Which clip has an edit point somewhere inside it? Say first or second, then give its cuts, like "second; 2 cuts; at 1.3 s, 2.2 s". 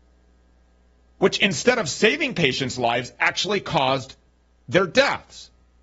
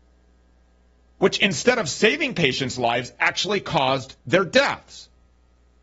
second; 1 cut; at 4.2 s